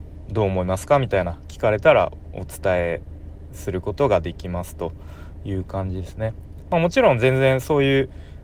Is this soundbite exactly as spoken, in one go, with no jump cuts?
yes; 0 cuts

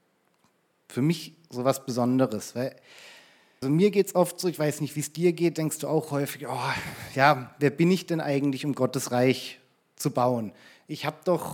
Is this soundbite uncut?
no; 1 cut; at 3.6 s

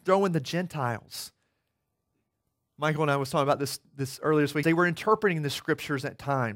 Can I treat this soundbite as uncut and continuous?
no; 1 cut; at 4.6 s

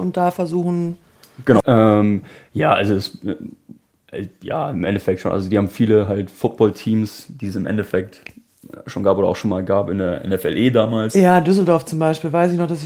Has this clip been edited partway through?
yes; 1 cut; at 1.6 s

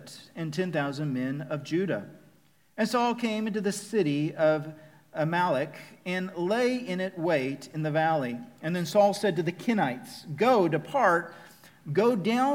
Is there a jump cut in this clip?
no; 0 cuts

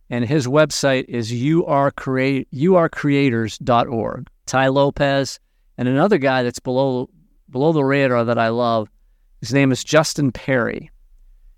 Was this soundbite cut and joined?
yes; 1 cut; at 4.4 s

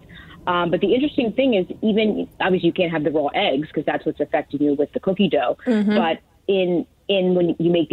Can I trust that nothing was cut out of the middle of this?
yes; 0 cuts

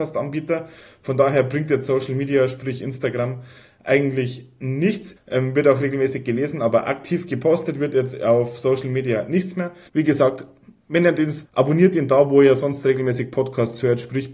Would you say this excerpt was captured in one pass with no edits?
no; 3 cuts; at 5.2 s, 9.9 s, 11.4 s

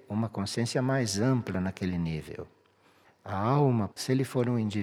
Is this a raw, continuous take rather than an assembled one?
no; 1 cut; at 3.9 s

